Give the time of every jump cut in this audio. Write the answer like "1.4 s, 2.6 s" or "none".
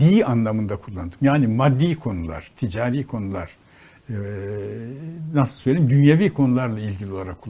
none